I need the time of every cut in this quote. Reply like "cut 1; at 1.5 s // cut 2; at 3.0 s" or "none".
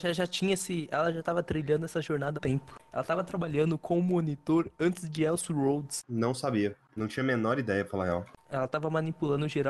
cut 1; at 2.4 s